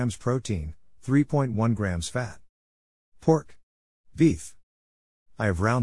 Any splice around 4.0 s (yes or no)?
yes